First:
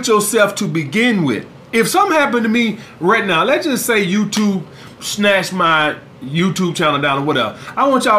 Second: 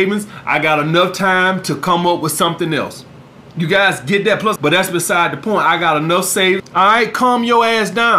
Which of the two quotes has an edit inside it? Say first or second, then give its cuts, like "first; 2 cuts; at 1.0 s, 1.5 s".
second; 2 cuts; at 4.6 s, 6.6 s